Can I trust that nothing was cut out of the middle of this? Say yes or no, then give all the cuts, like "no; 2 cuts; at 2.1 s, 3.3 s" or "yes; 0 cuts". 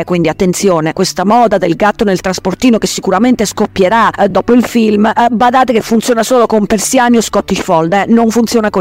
yes; 0 cuts